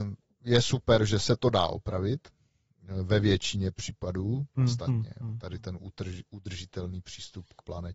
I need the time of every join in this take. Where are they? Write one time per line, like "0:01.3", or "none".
0:04.6